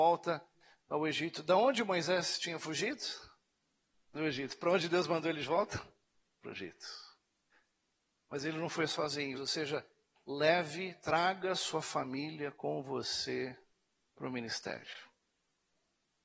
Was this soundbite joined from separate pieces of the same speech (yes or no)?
yes